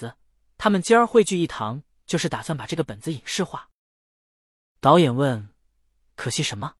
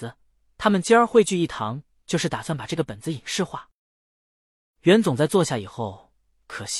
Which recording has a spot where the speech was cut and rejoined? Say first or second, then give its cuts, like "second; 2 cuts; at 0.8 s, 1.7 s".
first; 1 cut; at 4.7 s